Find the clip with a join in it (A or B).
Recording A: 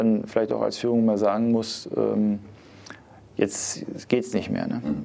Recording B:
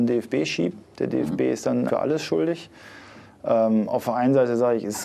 B